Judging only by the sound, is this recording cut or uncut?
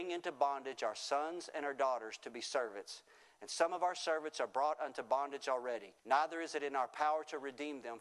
cut